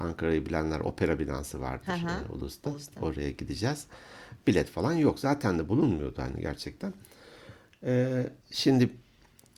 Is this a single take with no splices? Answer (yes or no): no